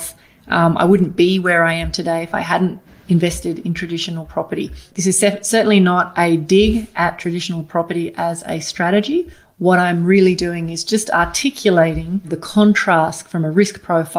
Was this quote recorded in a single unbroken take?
yes; 0 cuts

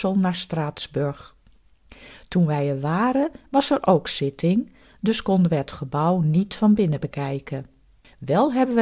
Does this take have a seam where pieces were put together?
no; 0 cuts

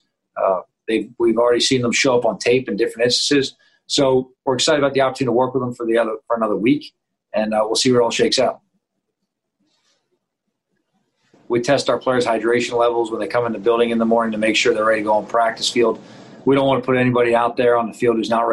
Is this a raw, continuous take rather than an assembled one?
no; 1 cut; at 11.3 s

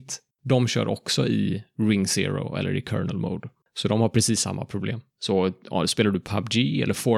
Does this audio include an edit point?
yes; 1 cut; at 5.1 s

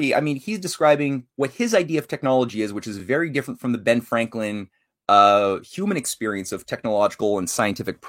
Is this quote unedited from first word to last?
yes; 0 cuts

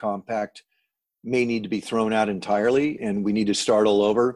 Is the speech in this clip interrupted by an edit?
yes; 1 cut; at 3.0 s

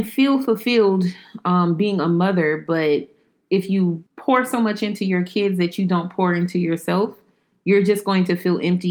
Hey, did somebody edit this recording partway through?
yes; 1 cut; at 4.1 s

